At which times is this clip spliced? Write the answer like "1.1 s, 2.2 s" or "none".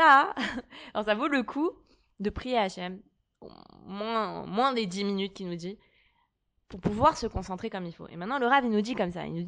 none